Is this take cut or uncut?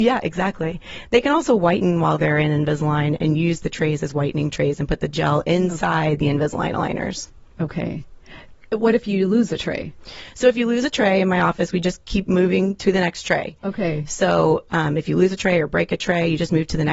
uncut